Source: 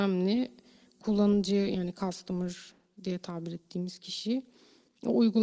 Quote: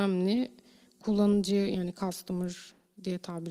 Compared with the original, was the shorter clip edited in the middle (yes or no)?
no